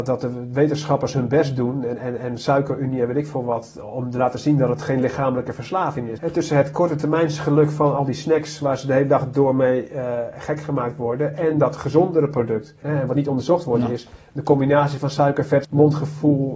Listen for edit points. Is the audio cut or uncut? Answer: cut